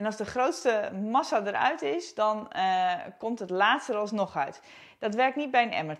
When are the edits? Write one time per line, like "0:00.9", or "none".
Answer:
none